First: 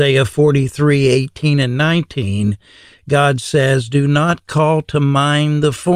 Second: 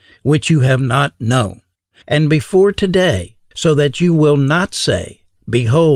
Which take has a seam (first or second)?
second